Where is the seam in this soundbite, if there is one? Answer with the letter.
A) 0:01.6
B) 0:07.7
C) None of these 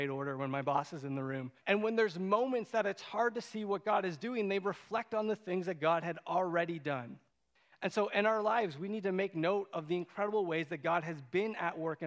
A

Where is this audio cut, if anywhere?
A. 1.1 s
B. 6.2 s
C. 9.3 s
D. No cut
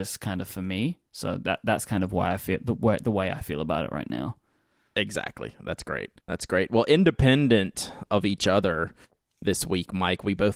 B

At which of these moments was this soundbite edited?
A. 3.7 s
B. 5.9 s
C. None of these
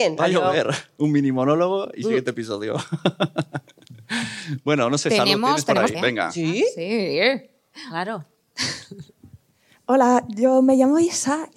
B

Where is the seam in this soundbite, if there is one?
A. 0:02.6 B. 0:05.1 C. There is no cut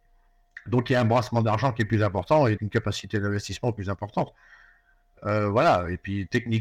A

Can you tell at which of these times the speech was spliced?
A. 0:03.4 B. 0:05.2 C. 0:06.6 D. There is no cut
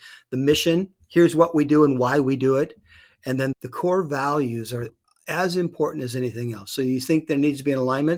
D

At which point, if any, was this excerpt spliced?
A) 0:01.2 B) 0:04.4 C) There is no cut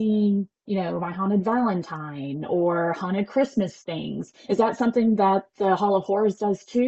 C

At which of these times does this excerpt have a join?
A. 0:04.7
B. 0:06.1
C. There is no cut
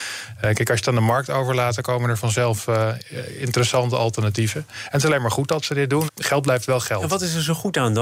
B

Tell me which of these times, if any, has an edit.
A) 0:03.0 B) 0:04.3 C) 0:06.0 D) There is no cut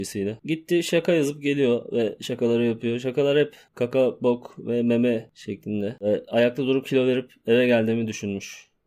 C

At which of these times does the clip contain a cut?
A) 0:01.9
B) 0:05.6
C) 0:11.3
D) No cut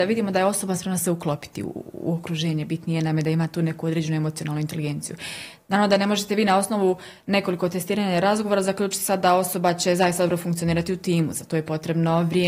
D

